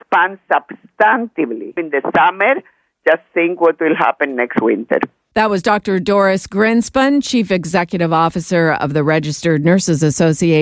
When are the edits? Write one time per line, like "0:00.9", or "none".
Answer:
0:01.8